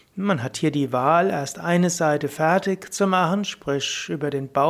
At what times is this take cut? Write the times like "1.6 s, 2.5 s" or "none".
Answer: none